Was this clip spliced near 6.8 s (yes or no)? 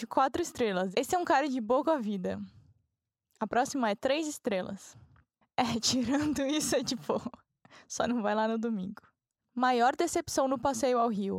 no